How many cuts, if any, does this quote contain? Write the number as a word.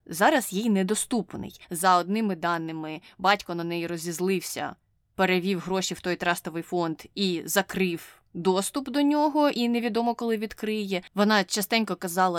two